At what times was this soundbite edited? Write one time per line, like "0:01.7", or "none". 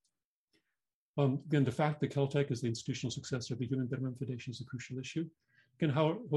none